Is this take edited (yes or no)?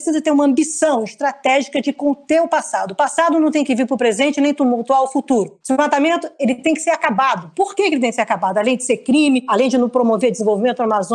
no